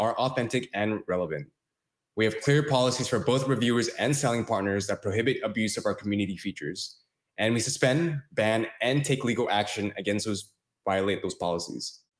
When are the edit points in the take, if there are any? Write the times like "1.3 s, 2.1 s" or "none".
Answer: none

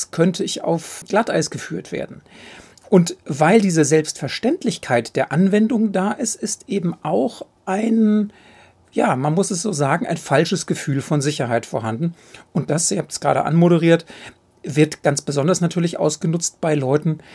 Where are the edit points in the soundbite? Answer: none

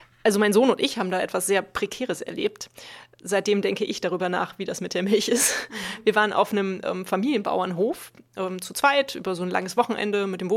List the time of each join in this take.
none

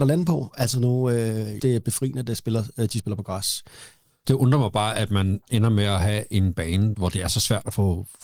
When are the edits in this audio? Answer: 1.6 s, 4.2 s, 6.9 s

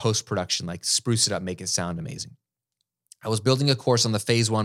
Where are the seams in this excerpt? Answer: none

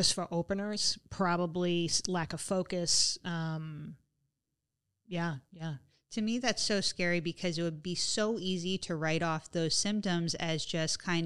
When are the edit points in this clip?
none

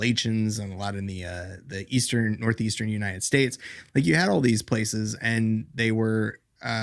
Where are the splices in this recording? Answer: none

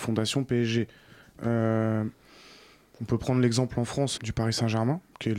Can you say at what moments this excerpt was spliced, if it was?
1.4 s, 4.2 s

